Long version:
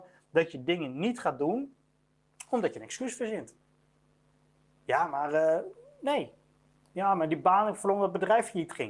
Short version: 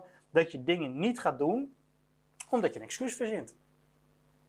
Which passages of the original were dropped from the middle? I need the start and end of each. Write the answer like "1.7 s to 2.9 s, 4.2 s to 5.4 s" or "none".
none